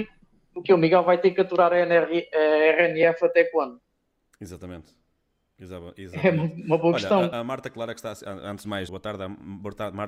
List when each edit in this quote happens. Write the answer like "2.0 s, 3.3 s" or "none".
7.3 s, 8.9 s